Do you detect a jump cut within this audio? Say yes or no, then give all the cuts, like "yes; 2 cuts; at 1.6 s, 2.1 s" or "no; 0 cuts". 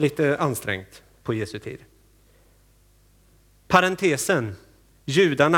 no; 0 cuts